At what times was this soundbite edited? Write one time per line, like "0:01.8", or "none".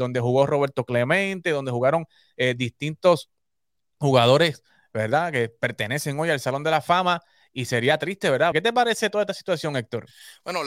0:08.5